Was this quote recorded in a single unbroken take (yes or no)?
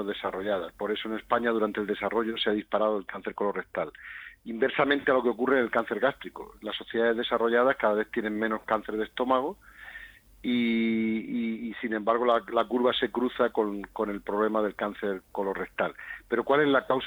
yes